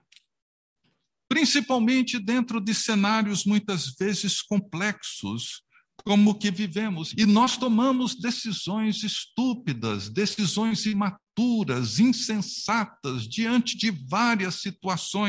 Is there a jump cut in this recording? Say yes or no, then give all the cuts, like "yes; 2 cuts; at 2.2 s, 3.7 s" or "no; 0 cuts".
yes; 1 cut; at 7.1 s